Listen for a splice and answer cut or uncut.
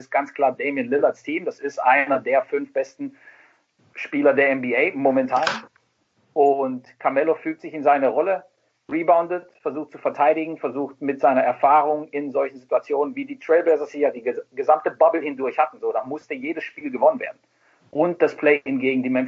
uncut